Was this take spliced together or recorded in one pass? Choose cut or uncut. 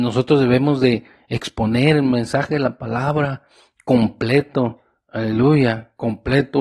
uncut